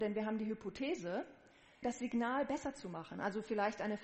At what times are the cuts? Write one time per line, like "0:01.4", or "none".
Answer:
0:01.8